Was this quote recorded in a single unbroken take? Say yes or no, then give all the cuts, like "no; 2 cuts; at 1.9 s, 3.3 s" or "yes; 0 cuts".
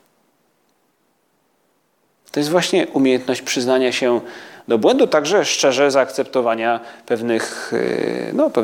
yes; 0 cuts